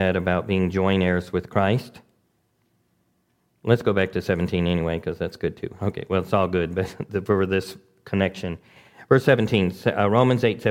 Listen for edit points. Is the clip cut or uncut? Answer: uncut